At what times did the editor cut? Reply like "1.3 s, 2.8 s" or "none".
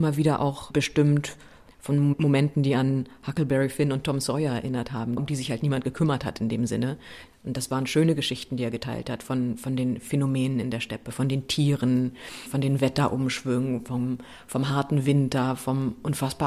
5.2 s